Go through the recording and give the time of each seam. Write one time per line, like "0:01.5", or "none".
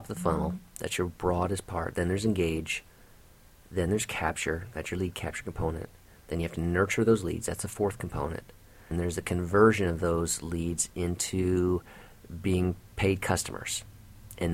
0:08.9

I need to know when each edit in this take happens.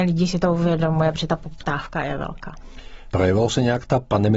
0:03.1

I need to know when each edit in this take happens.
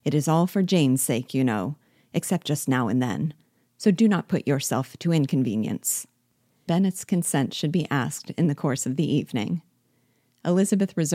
0:02.0
0:06.7

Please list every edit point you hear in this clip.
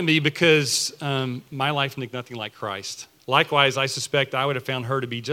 0:03.2

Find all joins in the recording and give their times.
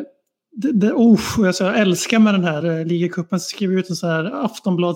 none

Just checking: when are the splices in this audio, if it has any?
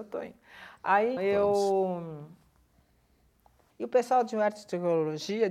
0:01.2
0:03.7

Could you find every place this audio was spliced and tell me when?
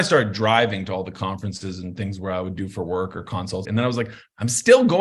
0:03.7

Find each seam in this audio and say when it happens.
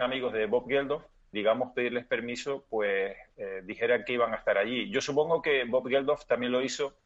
0:01.3

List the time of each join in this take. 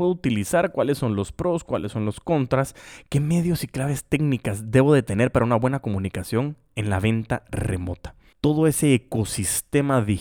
0:08.3

